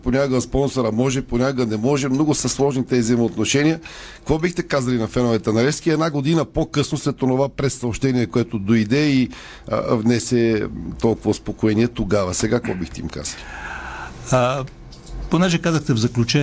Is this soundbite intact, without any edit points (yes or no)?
yes